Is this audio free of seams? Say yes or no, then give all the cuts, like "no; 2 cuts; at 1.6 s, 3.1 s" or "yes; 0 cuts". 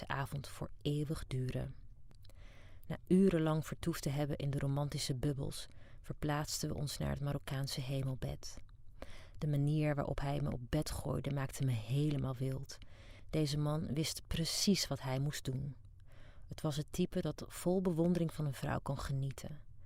yes; 0 cuts